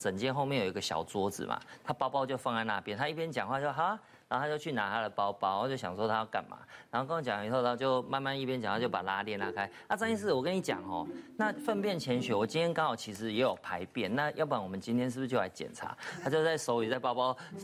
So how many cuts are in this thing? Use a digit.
0